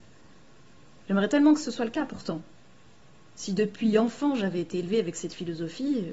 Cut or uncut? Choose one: uncut